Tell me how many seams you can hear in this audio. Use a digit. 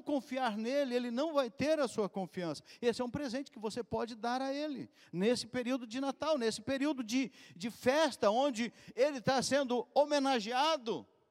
0